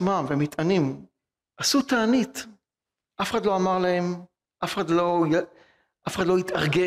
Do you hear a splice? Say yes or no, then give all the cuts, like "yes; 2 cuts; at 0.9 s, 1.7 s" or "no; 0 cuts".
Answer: yes; 1 cut; at 1.4 s